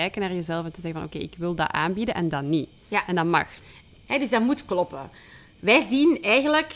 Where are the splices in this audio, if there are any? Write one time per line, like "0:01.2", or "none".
0:04.1